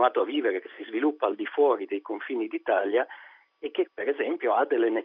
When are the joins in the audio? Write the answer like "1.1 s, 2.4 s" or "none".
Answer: 3.9 s

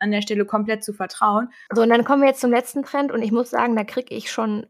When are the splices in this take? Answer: 1.7 s

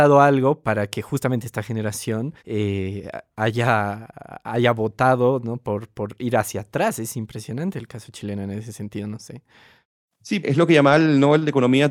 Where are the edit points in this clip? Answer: 2.4 s, 10.4 s

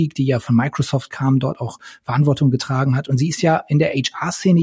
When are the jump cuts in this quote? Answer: none

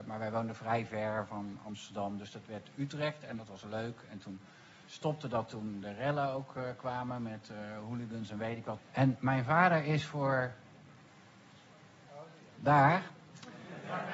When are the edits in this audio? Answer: 8.8 s

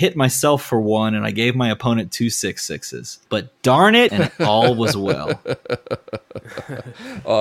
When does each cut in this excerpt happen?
4.1 s

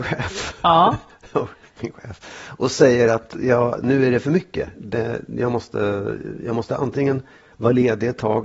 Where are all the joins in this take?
none

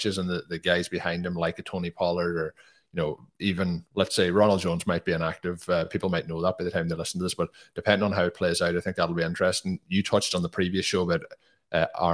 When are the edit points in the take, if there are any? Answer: none

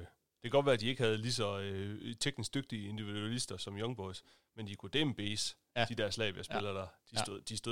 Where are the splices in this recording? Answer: none

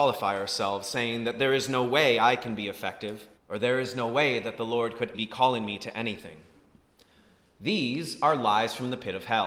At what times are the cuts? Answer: 3.4 s, 5.1 s

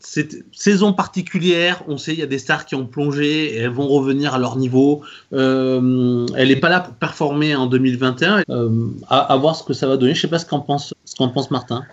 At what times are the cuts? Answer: 5.2 s, 8.4 s, 10.9 s

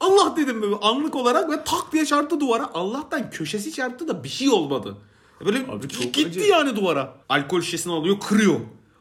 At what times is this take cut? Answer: 7.2 s

